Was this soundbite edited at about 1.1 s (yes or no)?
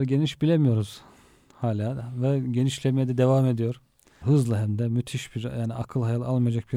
no